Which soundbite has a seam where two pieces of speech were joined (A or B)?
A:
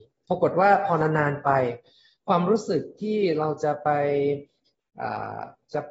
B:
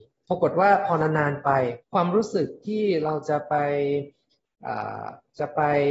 B